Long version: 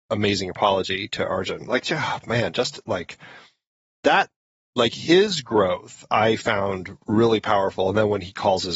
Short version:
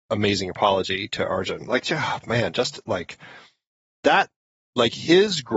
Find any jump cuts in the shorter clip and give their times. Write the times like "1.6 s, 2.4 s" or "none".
none